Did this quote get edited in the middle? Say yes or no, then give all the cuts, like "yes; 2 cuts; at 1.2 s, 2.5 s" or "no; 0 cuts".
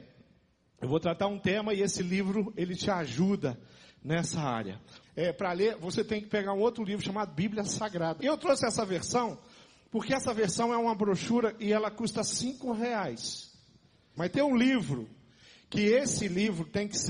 yes; 3 cuts; at 5.0 s, 8.2 s, 14.2 s